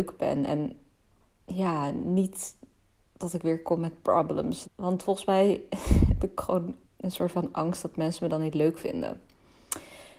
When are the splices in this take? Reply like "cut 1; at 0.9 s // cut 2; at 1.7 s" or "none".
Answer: cut 1; at 4.6 s // cut 2; at 6.8 s